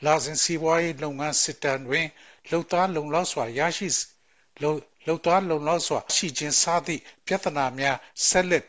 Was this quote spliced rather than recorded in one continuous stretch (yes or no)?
yes